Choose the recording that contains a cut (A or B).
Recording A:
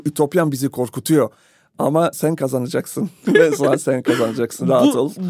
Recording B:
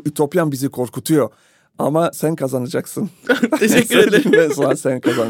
A